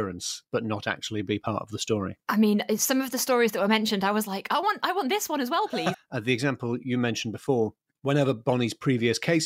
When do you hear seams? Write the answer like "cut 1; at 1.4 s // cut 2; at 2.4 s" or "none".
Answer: cut 1; at 5.9 s

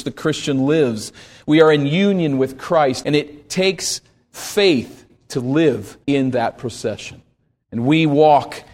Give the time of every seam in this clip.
cut 1; at 3.0 s // cut 2; at 6.0 s // cut 3; at 7.6 s

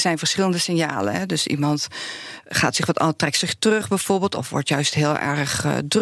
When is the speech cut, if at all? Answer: none

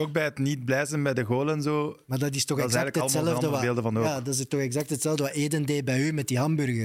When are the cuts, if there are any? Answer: none

